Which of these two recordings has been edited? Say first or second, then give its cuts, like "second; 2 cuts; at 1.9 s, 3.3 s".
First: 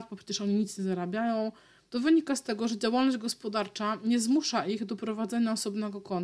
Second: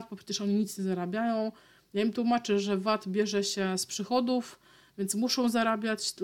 first; 1 cut; at 1.9 s